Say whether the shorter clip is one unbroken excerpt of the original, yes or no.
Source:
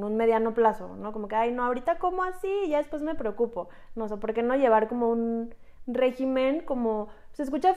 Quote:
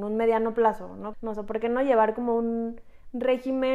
no